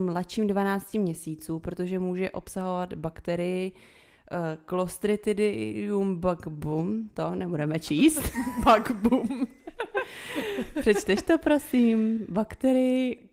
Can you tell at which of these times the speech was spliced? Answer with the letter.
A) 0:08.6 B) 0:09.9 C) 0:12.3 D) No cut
D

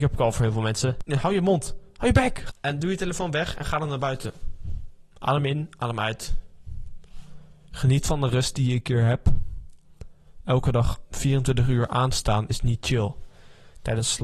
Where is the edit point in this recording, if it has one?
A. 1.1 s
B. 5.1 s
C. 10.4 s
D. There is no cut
A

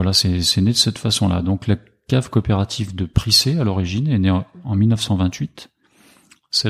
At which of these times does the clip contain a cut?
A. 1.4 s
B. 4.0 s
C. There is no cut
C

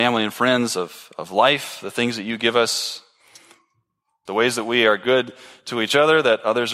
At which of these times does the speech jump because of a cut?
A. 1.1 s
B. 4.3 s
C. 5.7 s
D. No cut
B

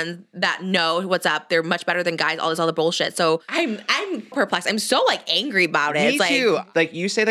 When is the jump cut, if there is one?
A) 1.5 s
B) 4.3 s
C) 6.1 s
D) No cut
B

